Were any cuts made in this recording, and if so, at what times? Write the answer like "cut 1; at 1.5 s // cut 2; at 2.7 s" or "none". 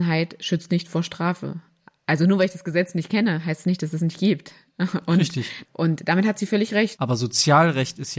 cut 1; at 5.6 s // cut 2; at 7.0 s